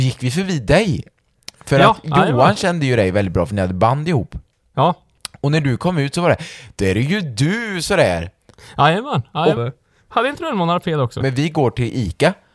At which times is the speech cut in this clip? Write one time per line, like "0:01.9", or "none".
0:09.6
0:11.2